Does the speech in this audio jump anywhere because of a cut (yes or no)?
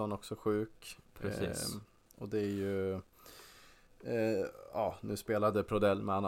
yes